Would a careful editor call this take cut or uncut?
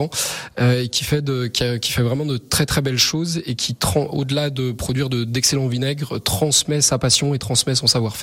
uncut